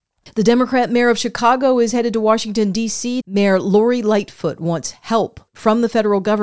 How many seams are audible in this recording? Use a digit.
1